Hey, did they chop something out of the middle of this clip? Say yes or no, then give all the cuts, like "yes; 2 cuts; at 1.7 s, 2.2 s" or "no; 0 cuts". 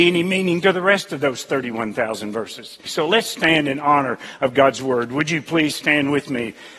yes; 1 cut; at 2.9 s